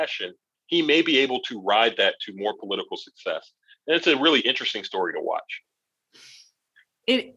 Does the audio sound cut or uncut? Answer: uncut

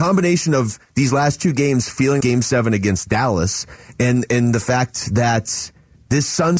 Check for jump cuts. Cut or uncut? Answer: cut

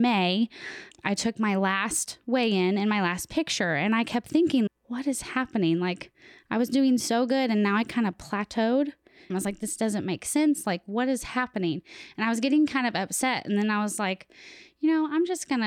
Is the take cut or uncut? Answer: cut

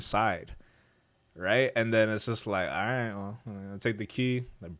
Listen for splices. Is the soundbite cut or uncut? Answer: uncut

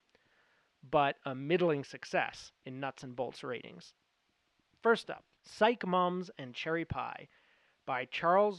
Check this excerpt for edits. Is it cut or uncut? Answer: uncut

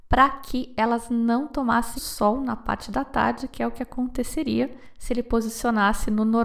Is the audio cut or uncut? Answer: cut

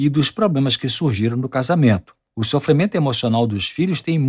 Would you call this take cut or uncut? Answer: cut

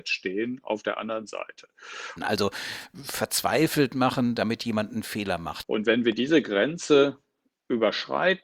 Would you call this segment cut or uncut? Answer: cut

